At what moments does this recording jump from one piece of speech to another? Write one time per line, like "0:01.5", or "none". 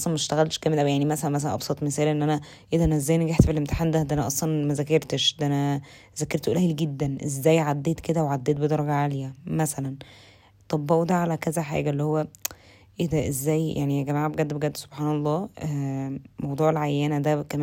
none